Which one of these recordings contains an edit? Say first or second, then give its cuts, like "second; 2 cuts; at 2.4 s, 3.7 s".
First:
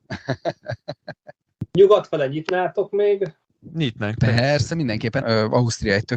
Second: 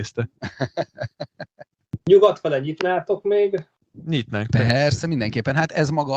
first; 1 cut; at 5.2 s